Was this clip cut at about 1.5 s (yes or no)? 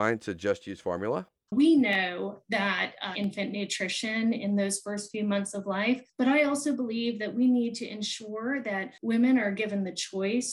yes